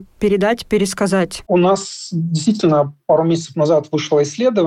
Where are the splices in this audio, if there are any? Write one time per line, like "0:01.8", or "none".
0:01.4